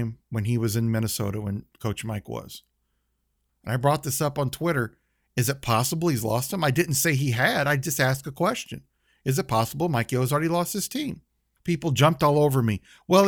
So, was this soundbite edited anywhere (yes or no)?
yes